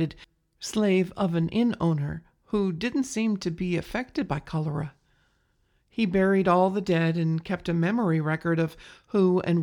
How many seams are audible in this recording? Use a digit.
0